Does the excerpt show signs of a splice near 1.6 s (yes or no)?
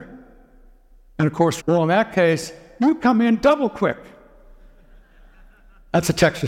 yes